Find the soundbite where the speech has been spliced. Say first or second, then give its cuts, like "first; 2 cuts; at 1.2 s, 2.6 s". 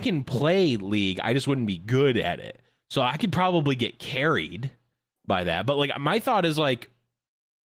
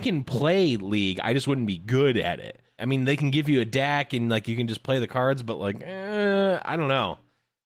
second; 1 cut; at 2.8 s